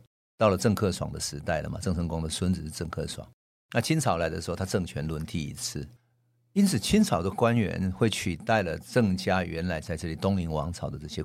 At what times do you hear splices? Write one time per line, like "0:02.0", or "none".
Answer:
none